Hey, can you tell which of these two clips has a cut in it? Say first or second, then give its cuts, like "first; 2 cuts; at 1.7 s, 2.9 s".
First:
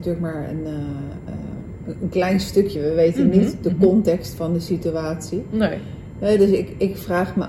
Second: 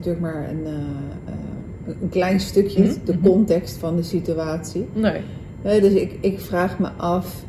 second; 1 cut; at 2.8 s